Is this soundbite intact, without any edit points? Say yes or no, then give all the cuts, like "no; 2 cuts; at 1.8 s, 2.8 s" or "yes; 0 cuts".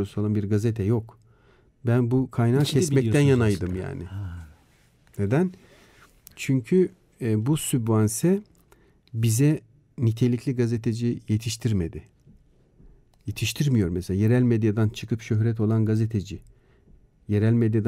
no; 1 cut; at 1.7 s